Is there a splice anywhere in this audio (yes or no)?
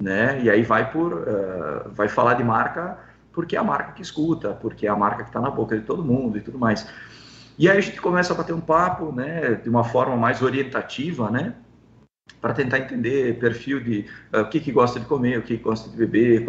no